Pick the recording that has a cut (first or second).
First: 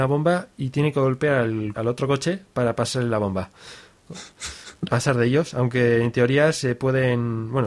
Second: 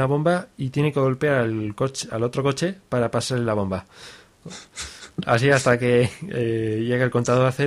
first